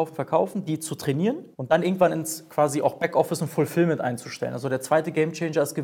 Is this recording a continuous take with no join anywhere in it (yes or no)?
no